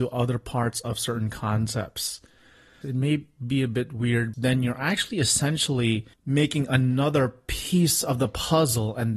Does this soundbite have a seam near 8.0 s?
no; 3 cuts; at 2.8 s, 4.3 s, 6.1 s

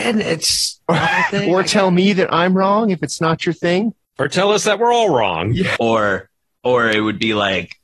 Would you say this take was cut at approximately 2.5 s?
no; 1 cut; at 5.8 s

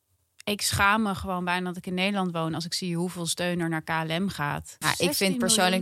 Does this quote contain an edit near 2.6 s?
no; 1 cut; at 4.8 s

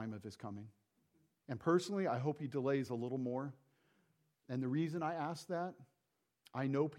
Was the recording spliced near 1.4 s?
yes; 1 cut; at 1.4 s

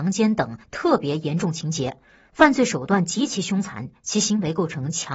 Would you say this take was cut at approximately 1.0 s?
no; 1 cut; at 2.3 s

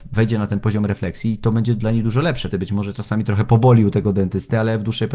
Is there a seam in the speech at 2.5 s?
yes; 1 cut; at 2.5 s

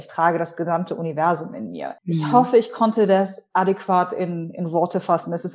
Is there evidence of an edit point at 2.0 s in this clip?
yes; 1 cut; at 2.0 s

